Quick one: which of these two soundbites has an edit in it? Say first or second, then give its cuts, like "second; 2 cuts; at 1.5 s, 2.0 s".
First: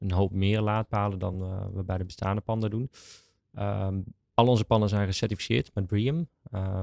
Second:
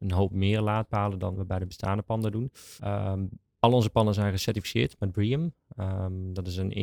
second; 2 cuts; at 1.3 s, 2.8 s